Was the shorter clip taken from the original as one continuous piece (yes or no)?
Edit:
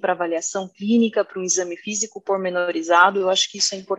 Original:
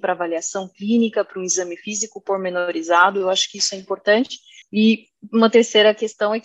yes